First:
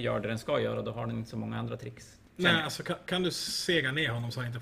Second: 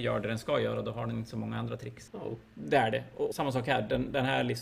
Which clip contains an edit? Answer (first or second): second